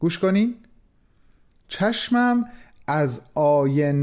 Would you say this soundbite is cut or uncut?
uncut